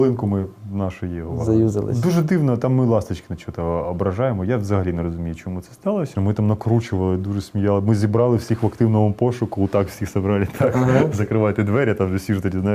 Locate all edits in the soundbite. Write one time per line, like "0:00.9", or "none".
0:06.1